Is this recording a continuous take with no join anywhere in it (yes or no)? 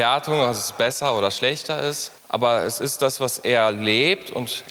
no